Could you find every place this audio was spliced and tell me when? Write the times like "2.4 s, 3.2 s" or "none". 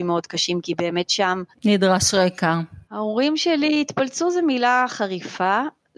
2.9 s